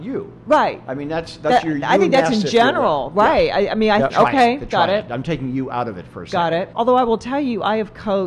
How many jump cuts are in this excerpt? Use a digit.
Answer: 2